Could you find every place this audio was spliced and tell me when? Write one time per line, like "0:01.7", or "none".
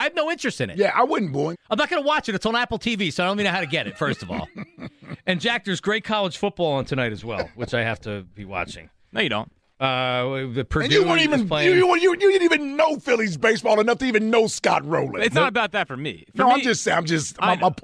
0:01.5